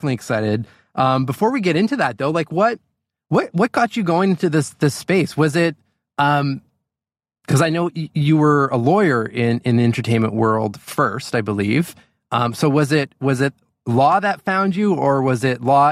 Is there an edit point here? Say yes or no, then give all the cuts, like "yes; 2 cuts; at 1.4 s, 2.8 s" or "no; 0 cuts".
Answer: no; 0 cuts